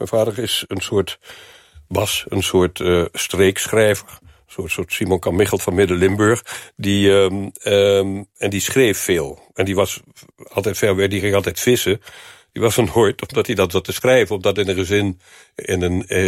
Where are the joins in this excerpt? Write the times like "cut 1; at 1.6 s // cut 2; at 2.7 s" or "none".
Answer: none

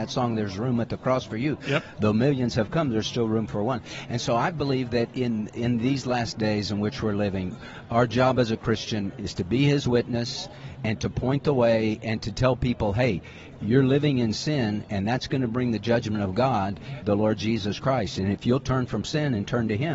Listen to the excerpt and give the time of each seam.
cut 1; at 17.0 s

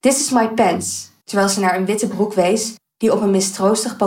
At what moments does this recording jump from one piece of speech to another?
cut 1; at 1.2 s

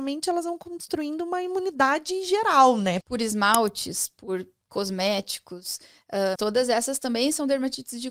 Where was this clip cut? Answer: cut 1; at 3.0 s // cut 2; at 6.4 s

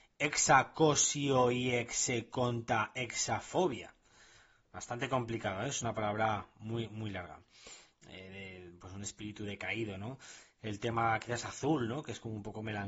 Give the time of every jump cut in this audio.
cut 1; at 7.9 s

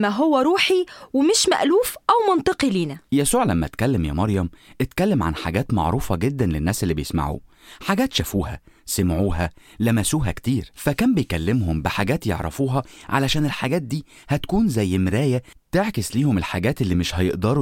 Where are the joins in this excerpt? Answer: cut 1; at 3.1 s

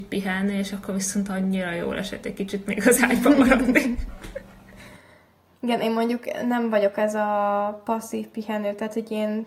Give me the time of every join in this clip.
none

